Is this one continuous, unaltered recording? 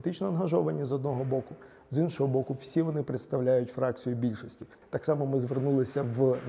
no; 1 cut; at 4.8 s

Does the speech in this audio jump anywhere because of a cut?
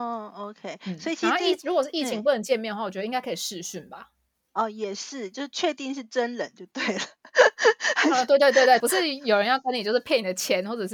yes; 1 cut; at 8.8 s

